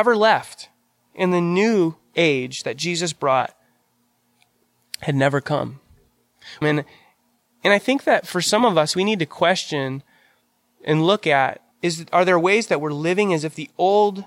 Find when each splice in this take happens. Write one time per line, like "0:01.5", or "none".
0:06.6
0:11.7

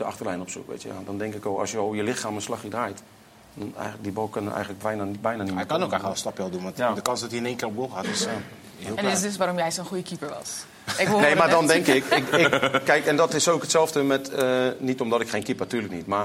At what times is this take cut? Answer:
none

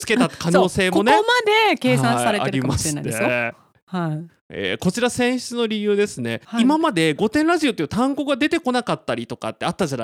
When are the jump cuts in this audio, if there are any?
none

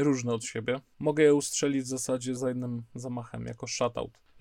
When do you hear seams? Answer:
0:02.4

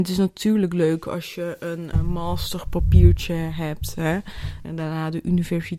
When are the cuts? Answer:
0:01.9
0:04.6

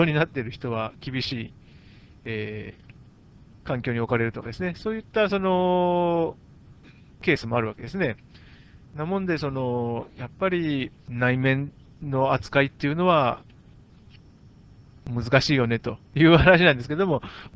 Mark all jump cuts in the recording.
0:11.0

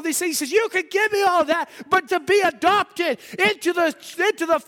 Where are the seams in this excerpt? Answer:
0:02.1

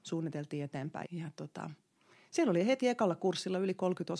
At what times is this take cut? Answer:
0:01.0

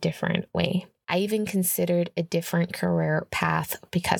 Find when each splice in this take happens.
0:01.0

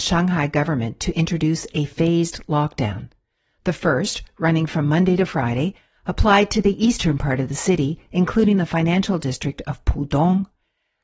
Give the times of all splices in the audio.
none

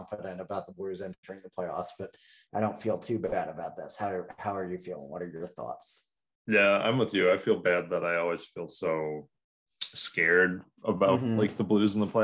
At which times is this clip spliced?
none

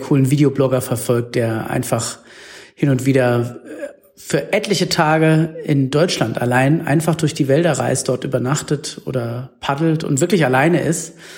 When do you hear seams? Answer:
none

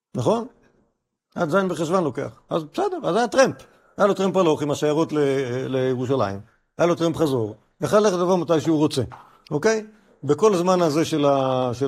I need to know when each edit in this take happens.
none

